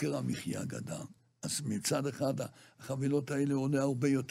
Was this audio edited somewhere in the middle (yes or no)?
no